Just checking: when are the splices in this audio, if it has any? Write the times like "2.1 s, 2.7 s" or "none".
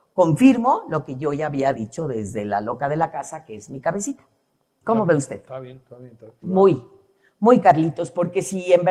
6.4 s